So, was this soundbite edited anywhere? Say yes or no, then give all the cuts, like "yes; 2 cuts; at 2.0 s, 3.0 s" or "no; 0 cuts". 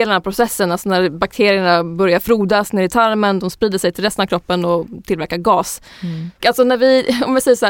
yes; 2 cuts; at 3.4 s, 6.4 s